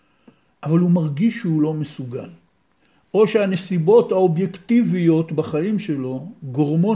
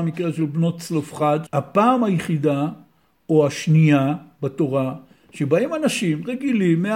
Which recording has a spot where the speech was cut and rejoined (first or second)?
second